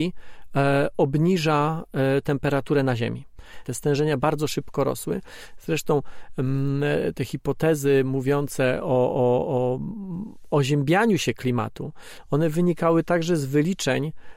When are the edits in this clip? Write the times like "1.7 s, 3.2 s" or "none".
3.6 s